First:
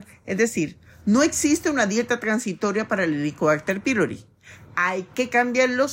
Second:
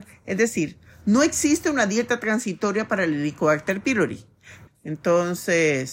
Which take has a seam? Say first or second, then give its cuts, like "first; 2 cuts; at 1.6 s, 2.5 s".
second; 1 cut; at 4.7 s